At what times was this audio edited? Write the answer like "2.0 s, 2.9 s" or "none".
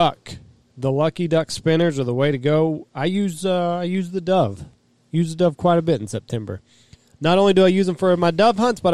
none